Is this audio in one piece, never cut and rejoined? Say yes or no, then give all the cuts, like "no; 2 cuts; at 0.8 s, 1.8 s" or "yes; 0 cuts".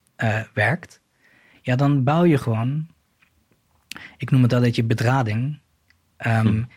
no; 1 cut; at 1.5 s